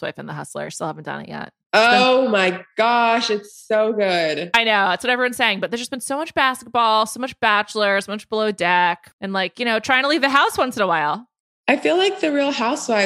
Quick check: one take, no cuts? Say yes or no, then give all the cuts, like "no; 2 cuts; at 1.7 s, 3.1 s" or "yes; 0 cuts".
no; 1 cut; at 9.1 s